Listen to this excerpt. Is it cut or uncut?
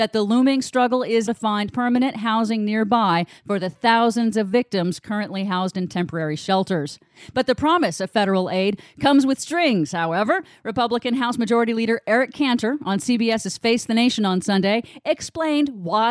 cut